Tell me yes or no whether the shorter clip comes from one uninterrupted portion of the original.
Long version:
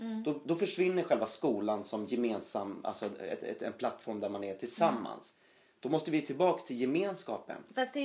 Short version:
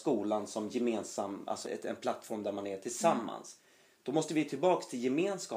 no